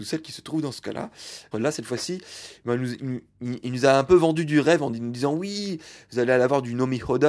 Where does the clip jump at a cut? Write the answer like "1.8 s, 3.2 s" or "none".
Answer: 1.5 s